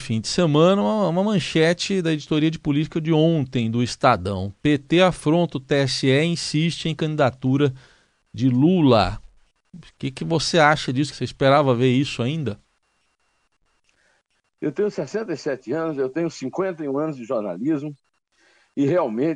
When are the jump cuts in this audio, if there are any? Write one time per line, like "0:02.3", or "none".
0:11.1